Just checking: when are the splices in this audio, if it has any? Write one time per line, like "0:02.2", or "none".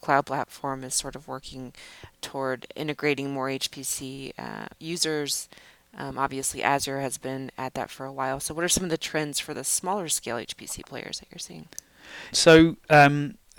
0:12.3